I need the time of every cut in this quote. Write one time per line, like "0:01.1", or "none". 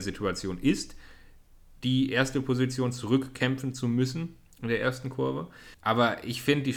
0:05.7